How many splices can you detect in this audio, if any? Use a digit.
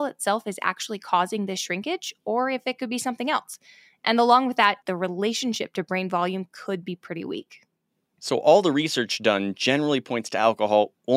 1